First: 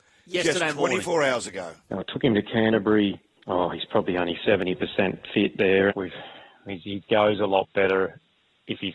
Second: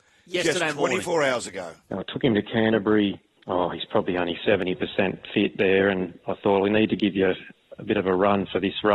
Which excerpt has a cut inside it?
first; 2 cuts; at 5.9 s, 7.0 s

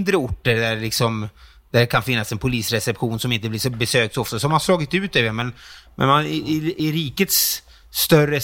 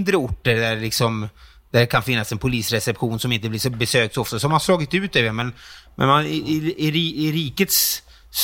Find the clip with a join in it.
first; 1 cut; at 6.8 s

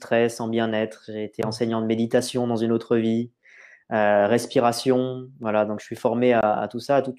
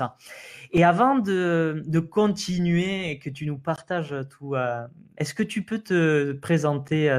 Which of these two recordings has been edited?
second; 1 cut; at 5.2 s

